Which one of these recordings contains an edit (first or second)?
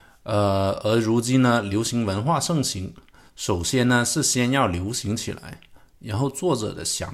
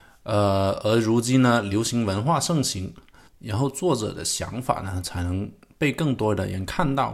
second